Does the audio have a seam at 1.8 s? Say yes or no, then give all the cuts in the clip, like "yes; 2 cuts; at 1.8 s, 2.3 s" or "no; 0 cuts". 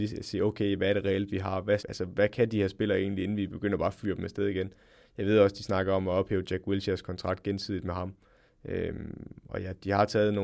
yes; 1 cut; at 1.8 s